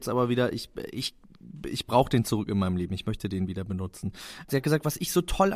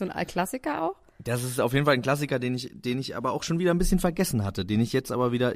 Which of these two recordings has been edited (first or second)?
first